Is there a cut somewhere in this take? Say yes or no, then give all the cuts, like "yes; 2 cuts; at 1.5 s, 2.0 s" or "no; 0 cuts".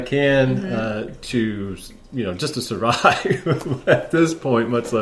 no; 0 cuts